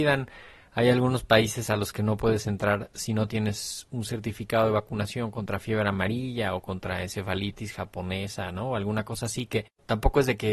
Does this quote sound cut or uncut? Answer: uncut